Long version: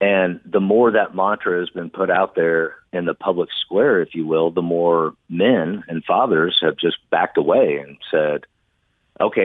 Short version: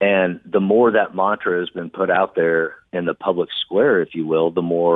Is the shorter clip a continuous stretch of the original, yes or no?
yes